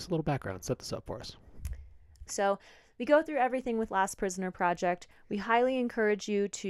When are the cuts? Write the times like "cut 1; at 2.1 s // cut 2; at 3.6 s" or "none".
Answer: cut 1; at 2.3 s